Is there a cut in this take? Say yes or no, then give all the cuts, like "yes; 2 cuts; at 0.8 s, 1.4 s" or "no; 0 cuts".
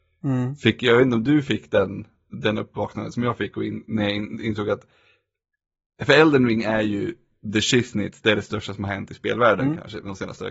no; 0 cuts